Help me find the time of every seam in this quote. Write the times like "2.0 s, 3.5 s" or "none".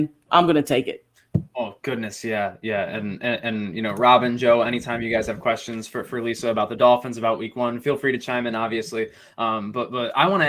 none